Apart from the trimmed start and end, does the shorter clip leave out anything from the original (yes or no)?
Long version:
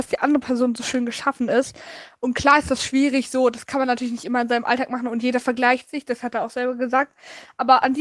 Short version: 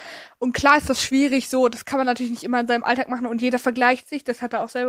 no